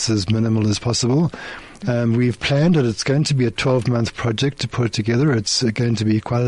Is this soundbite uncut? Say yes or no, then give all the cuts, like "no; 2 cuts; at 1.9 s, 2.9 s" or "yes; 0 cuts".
no; 1 cut; at 1.8 s